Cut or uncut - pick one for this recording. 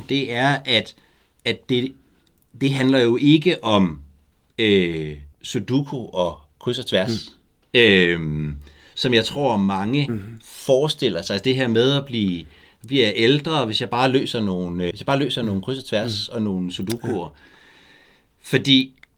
cut